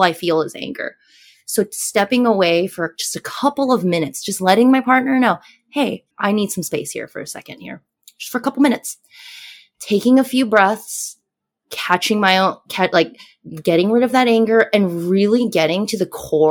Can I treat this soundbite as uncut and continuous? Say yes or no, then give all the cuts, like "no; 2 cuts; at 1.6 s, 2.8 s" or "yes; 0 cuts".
no; 1 cut; at 6.1 s